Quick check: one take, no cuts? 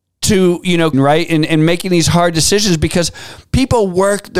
no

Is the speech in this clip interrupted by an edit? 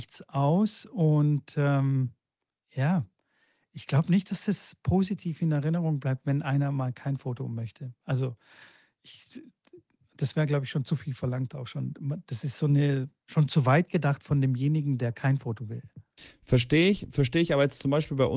no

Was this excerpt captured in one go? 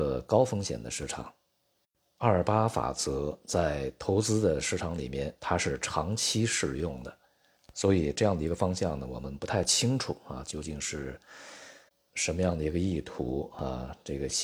no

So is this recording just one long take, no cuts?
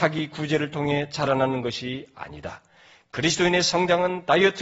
yes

